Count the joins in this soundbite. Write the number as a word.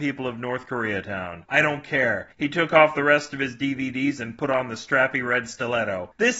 one